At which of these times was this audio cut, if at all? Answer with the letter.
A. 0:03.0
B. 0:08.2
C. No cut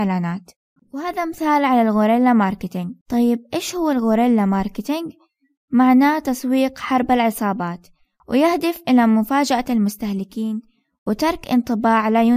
A